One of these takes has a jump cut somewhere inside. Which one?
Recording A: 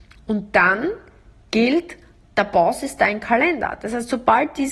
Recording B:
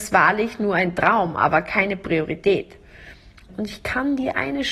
B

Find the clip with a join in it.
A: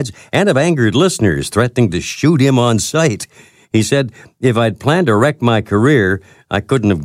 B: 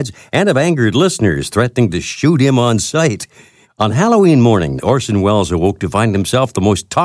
B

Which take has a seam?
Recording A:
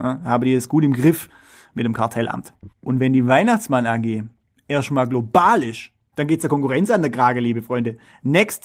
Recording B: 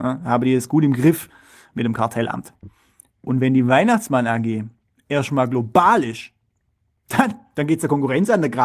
A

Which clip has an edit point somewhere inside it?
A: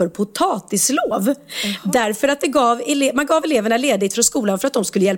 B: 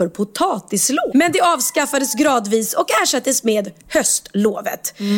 B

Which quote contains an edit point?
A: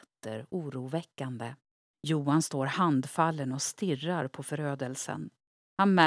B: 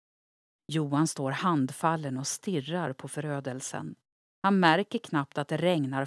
A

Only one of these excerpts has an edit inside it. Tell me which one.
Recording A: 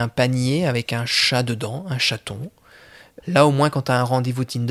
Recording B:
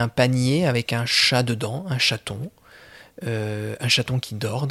A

